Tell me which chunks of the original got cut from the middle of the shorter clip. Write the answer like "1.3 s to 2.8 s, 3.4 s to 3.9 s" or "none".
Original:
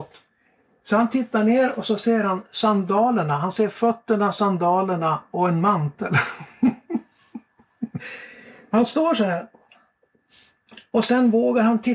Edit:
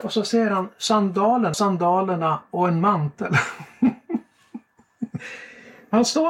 3.3 s to 4.3 s